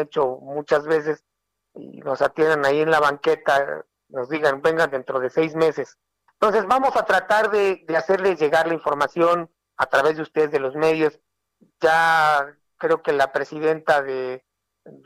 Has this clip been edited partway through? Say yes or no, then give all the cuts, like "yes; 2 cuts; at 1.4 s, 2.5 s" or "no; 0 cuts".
yes; 1 cut; at 6.3 s